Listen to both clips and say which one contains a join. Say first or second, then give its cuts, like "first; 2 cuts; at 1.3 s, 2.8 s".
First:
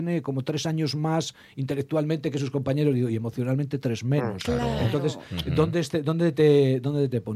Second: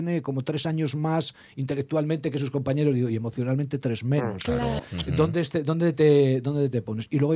second; 1 cut; at 4.8 s